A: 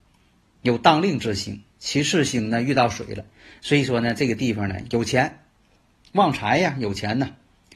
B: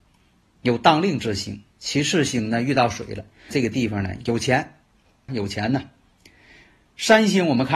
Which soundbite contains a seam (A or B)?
B